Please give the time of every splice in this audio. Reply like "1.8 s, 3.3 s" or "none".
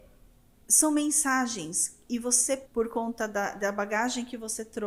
2.6 s